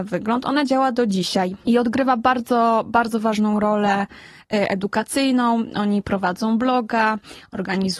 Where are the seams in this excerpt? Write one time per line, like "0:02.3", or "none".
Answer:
none